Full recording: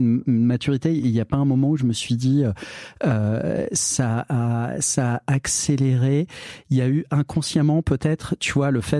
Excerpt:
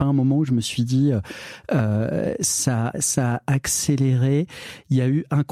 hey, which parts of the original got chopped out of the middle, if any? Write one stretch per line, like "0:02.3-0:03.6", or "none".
0:04.3-0:04.7